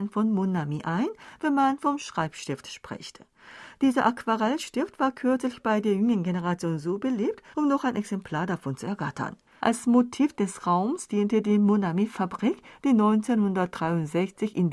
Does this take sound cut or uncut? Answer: cut